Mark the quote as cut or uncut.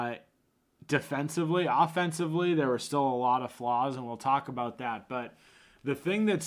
uncut